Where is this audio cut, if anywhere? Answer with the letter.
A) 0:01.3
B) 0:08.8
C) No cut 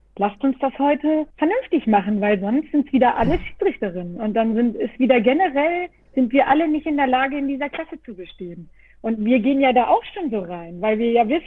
A